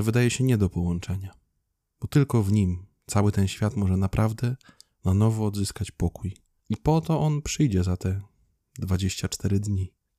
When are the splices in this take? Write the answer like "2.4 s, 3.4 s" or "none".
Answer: none